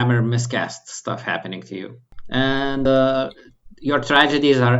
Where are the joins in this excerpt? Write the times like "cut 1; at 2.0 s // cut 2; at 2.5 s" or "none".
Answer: none